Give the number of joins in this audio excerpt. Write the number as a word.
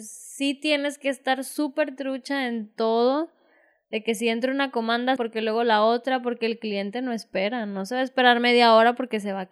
one